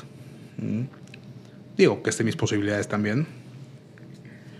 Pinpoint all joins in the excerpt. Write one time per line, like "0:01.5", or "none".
0:01.7